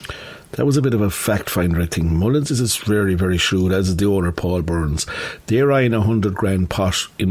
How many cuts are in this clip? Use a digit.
0